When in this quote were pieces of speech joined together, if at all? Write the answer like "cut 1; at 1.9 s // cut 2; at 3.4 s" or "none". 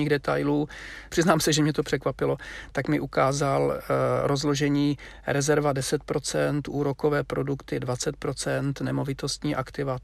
cut 1; at 1.1 s